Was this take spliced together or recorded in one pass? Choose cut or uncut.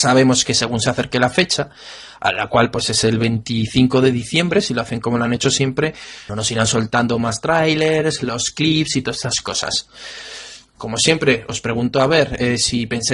cut